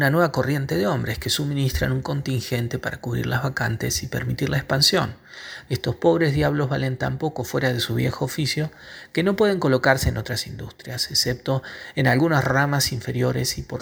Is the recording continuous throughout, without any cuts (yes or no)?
no